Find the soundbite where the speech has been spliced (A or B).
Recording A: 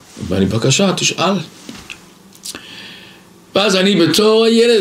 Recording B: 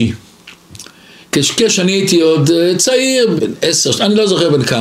B